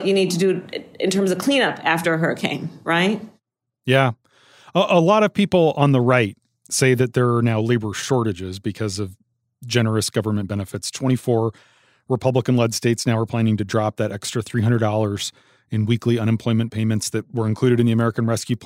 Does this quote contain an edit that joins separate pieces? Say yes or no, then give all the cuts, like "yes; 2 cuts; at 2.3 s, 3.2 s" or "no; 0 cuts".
no; 0 cuts